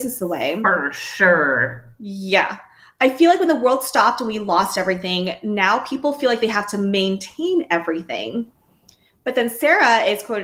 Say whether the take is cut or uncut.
uncut